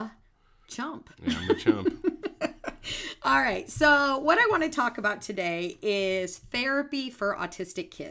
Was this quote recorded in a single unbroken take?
yes; 0 cuts

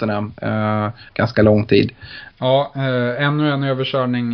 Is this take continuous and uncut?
no; 2 cuts; at 1.1 s, 2.3 s

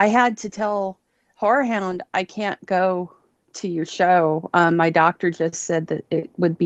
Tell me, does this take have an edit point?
no; 0 cuts

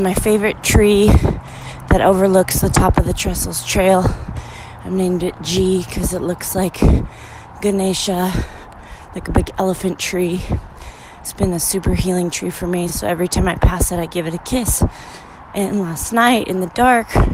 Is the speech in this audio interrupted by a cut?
no; 0 cuts

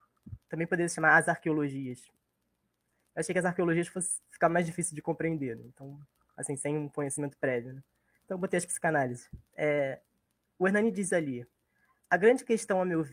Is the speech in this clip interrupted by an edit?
yes; 1 cut; at 9.5 s

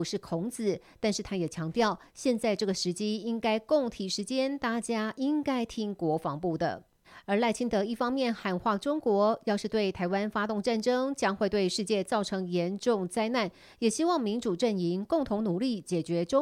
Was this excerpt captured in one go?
no; 1 cut; at 7.0 s

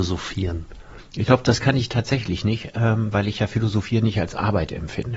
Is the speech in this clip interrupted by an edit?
yes; 1 cut; at 1.0 s

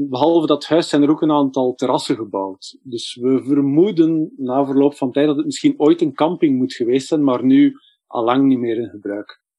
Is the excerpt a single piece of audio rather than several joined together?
yes; 0 cuts

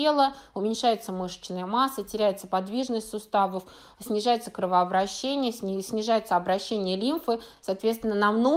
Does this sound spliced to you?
no; 0 cuts

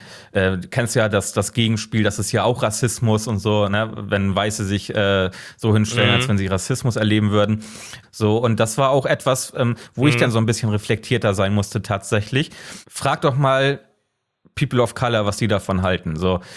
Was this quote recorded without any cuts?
no; 1 cut; at 8.0 s

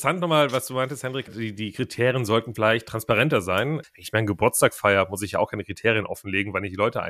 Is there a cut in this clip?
yes; 2 cuts; at 1.3 s, 3.8 s

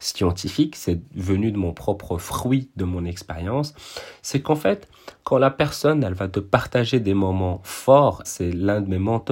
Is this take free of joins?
no; 1 cut; at 8.2 s

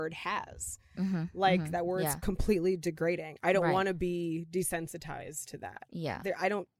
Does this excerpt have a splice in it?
no; 0 cuts

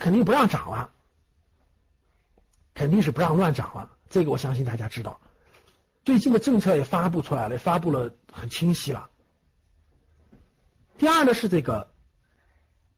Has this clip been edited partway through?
no; 0 cuts

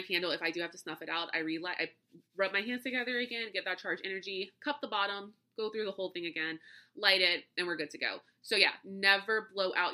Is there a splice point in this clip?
no; 0 cuts

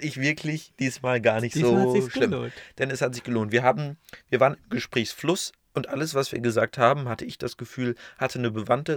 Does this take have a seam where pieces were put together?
no; 0 cuts

